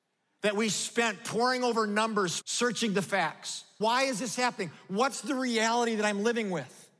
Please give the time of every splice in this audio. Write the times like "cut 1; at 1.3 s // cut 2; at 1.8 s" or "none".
cut 1; at 2.4 s // cut 2; at 3.8 s